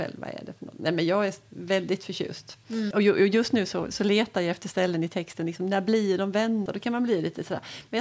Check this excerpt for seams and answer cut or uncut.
cut